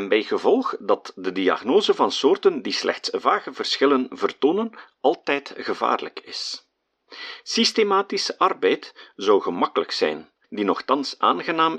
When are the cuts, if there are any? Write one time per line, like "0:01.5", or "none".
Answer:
0:10.4